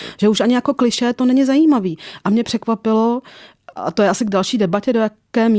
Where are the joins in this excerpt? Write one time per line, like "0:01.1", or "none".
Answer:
0:03.7